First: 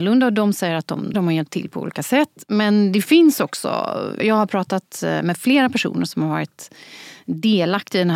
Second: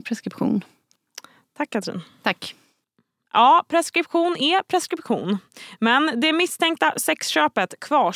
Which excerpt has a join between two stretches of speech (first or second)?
first